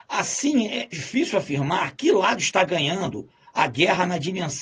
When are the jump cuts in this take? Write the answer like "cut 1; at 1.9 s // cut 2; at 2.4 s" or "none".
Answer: cut 1; at 0.9 s